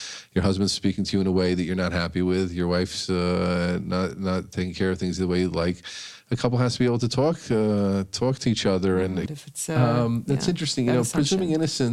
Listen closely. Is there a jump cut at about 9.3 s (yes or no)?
yes